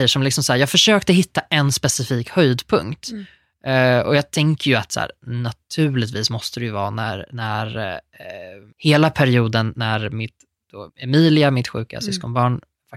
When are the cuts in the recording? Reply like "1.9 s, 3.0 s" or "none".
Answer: 8.7 s, 10.9 s